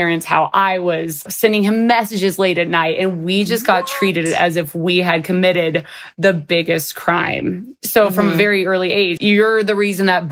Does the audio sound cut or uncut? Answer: cut